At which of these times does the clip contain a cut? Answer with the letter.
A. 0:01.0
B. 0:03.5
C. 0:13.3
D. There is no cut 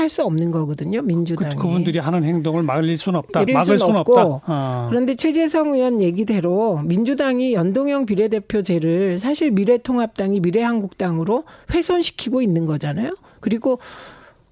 B